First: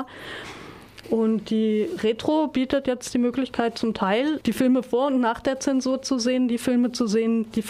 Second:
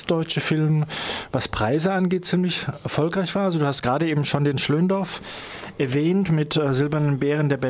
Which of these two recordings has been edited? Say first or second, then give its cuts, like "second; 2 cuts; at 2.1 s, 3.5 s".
first; 2 cuts; at 1.0 s, 4.4 s